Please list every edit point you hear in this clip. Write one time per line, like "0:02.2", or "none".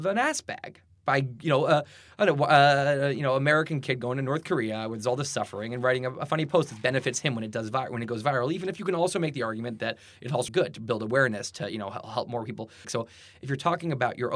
0:10.5
0:12.8